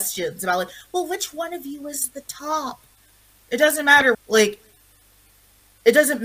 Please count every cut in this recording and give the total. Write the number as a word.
one